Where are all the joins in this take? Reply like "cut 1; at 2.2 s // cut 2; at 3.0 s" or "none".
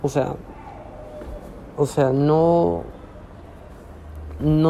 none